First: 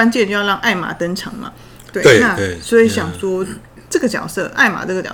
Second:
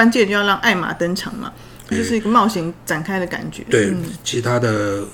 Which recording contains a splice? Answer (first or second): second